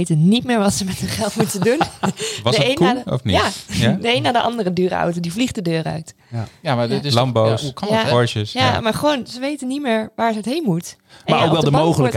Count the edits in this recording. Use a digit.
0